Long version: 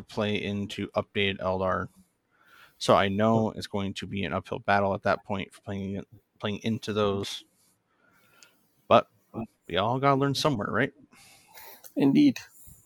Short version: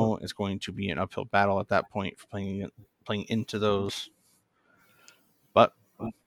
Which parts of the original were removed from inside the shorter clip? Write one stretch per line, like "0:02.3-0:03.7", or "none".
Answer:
none

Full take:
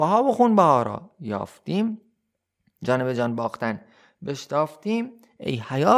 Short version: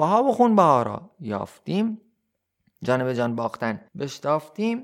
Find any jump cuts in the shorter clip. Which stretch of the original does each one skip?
0:03.9-0:04.1

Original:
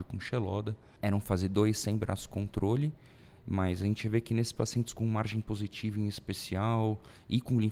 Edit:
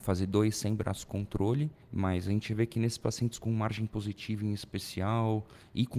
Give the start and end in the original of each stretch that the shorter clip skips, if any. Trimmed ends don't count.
0:03.0-0:03.4

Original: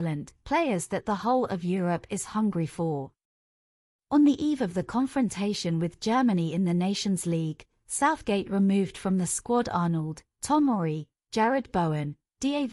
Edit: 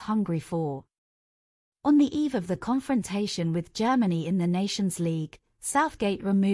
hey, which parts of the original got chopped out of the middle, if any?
none

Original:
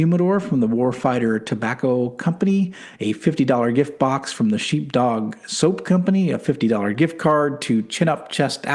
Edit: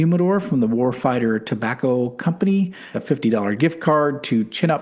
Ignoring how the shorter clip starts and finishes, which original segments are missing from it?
0:02.9-0:06.3

